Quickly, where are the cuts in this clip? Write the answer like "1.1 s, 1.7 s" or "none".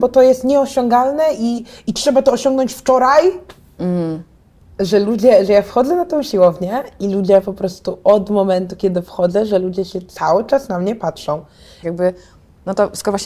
4.6 s, 11.8 s